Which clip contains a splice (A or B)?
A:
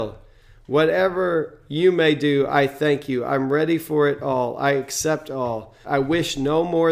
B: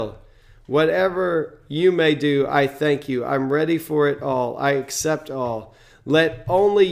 A